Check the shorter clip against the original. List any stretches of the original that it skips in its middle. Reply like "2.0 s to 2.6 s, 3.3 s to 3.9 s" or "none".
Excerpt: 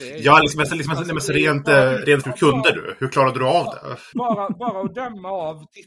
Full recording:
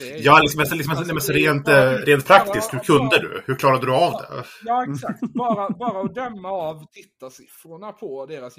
2.2 s to 2.7 s, 4.6 s to 5.3 s

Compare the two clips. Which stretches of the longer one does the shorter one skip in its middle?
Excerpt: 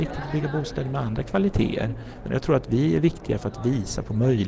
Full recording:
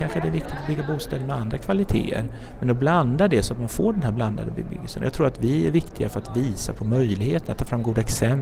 2.6 s to 4.9 s

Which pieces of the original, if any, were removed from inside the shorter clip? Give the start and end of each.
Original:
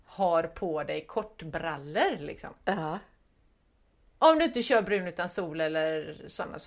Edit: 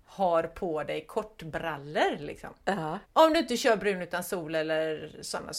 3.0 s to 4.1 s

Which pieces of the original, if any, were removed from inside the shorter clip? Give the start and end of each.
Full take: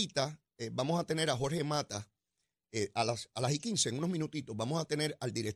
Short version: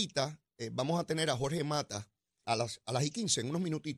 2.4 s to 2.9 s

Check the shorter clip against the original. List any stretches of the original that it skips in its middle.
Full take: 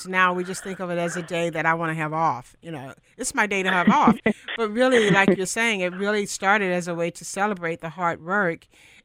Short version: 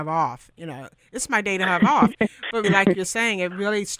4.7 s to 5.0 s

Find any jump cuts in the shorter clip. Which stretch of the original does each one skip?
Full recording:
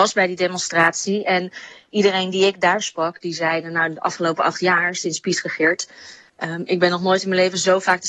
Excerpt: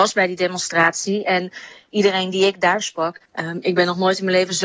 3.2 s to 6.2 s

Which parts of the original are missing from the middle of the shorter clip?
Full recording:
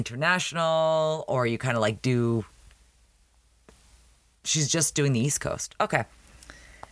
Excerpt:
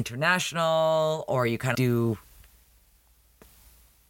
1.7 s to 2.0 s

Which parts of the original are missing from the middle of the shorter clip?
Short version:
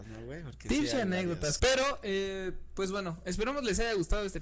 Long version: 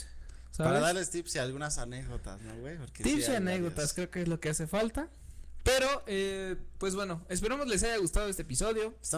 3.9 s to 5.6 s

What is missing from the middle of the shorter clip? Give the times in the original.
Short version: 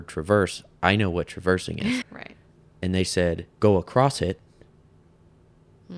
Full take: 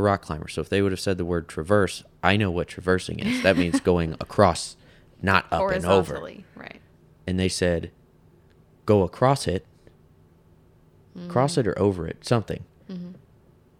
3.4 s to 6.5 s, 8.0 s to 8.8 s

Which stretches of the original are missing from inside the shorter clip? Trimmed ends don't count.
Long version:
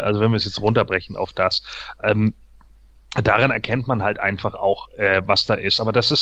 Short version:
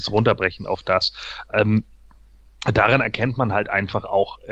none

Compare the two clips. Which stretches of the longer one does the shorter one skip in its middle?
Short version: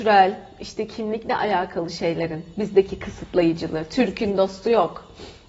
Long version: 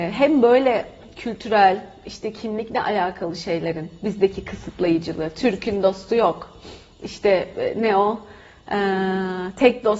none

